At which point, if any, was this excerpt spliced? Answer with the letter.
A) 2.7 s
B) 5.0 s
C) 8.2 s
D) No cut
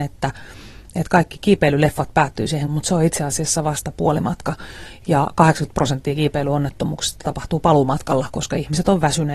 A